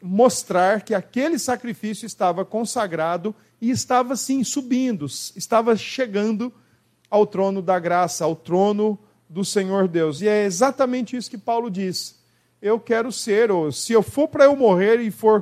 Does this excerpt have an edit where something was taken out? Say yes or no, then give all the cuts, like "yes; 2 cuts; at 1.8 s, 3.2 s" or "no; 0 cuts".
no; 0 cuts